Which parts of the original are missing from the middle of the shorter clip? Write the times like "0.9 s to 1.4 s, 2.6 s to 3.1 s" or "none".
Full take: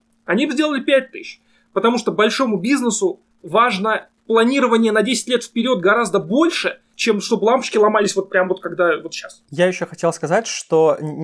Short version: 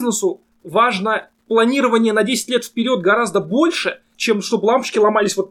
none